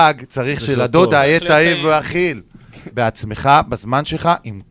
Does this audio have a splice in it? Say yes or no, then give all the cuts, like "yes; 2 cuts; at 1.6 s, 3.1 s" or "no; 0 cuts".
yes; 1 cut; at 2.9 s